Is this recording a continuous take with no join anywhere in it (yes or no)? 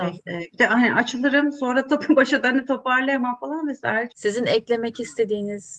no